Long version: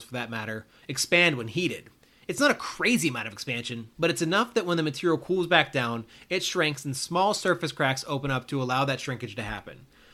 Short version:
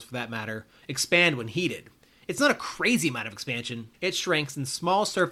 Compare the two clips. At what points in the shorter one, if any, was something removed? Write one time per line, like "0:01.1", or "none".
0:03.9